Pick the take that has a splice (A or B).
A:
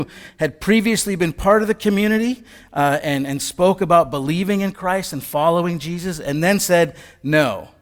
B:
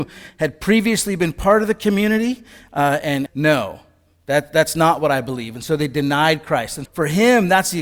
B